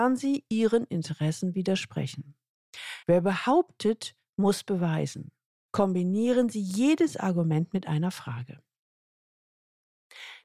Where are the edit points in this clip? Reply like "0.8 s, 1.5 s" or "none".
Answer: 3.0 s, 5.7 s